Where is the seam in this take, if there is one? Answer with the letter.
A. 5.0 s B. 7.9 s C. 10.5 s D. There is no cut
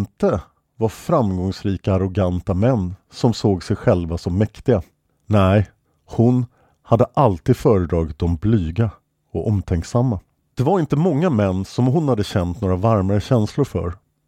C